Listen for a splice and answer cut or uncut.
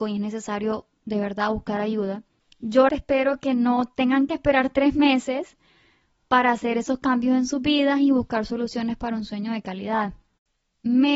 cut